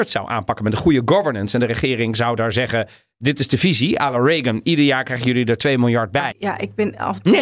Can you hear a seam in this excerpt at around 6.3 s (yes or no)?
yes